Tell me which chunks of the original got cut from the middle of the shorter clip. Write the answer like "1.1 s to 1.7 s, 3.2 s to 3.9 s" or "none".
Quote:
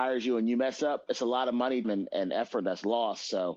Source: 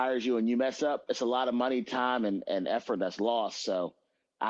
1.8 s to 2.2 s